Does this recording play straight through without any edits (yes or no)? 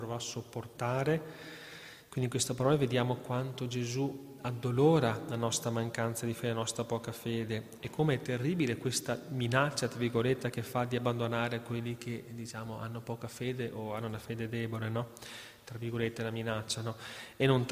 yes